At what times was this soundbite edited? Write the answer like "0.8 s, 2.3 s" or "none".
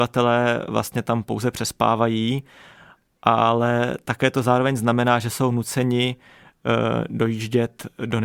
none